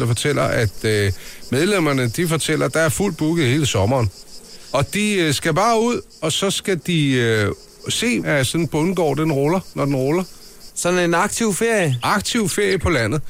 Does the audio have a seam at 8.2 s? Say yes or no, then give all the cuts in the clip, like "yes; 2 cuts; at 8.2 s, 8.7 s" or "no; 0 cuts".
yes; 2 cuts; at 8.2 s, 10.7 s